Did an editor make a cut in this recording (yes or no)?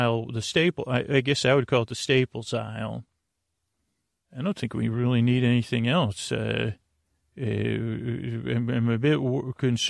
no